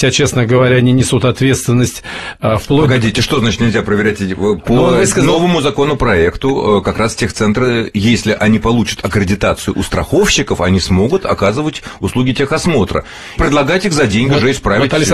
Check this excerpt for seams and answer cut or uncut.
cut